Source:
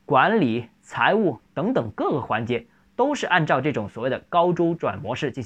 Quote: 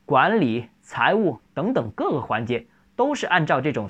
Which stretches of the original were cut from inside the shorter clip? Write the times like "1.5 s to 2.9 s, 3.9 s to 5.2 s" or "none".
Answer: none